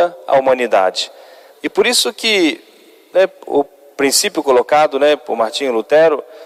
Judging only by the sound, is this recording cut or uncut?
cut